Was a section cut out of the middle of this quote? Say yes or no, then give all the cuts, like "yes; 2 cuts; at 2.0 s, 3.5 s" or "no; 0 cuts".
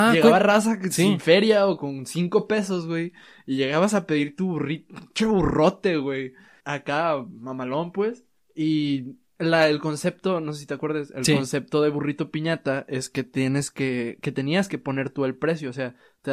no; 0 cuts